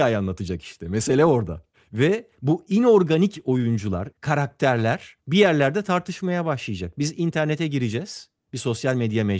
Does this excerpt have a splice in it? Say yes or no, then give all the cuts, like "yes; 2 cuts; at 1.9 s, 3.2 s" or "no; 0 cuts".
yes; 1 cut; at 4.1 s